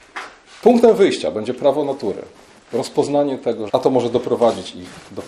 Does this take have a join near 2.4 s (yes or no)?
no